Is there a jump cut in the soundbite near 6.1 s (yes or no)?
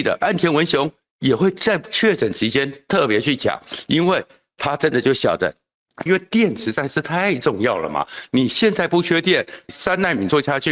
yes